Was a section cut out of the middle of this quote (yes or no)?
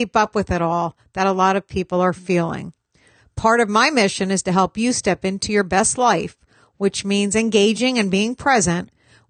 no